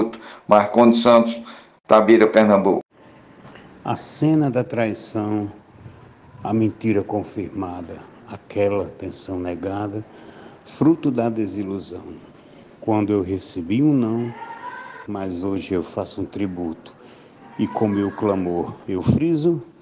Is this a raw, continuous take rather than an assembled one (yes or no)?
no